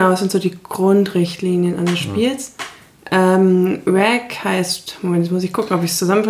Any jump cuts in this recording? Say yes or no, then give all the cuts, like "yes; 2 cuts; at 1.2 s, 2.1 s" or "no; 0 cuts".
no; 0 cuts